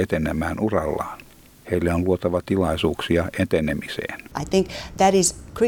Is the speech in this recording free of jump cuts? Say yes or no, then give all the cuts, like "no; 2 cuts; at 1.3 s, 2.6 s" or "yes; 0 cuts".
no; 1 cut; at 4.4 s